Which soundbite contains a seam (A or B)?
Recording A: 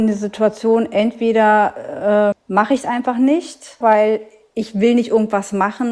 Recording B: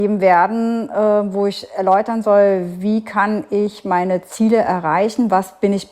A